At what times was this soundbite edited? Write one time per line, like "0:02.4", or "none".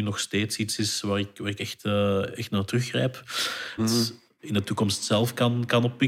0:03.8